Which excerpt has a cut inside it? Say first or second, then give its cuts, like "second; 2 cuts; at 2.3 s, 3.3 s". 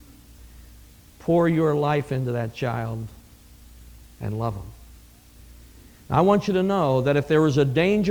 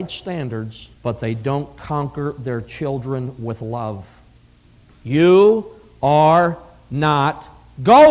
second; 2 cuts; at 1.0 s, 4.9 s